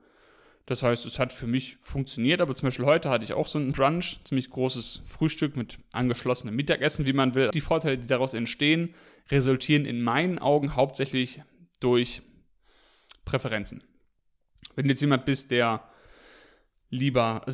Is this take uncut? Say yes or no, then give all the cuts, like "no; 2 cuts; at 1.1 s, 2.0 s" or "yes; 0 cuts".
no; 2 cuts; at 3.7 s, 7.5 s